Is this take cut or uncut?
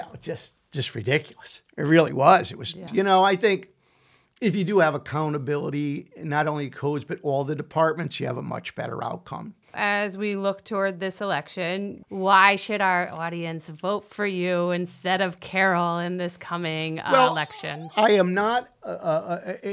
cut